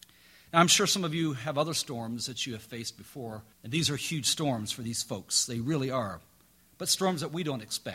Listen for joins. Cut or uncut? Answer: cut